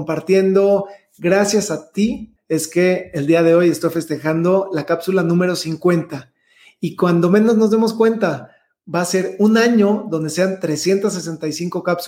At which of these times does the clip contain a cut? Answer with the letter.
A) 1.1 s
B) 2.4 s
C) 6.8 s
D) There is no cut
B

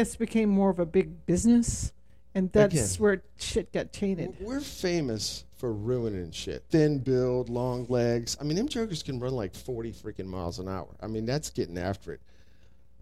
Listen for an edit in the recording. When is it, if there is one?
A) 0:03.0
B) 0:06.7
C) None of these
B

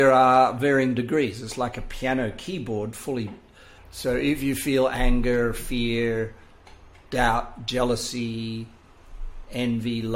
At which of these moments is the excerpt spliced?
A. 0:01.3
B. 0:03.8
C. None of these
B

